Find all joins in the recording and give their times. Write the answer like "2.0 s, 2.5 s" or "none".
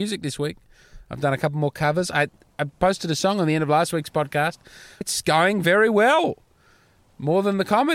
5.0 s